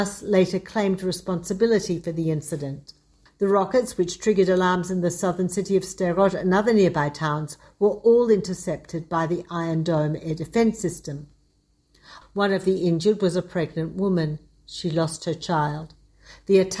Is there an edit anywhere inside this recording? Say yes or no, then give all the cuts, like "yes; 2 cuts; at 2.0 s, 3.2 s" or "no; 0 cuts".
yes; 2 cuts; at 3.3 s, 12.2 s